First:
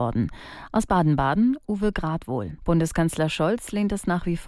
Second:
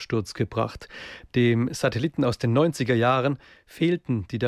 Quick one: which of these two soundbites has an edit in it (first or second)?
first